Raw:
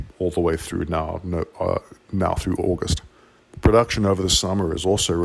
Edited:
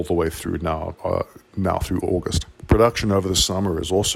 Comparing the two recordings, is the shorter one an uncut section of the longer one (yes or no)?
no